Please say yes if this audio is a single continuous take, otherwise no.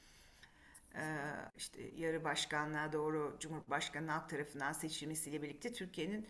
no